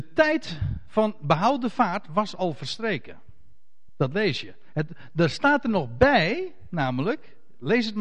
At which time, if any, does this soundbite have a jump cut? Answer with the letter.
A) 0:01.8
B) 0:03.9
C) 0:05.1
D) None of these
D